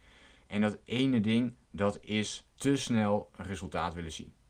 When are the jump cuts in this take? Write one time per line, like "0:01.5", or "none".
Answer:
0:02.5